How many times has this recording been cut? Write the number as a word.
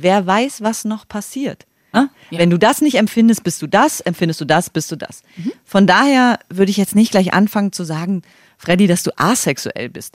one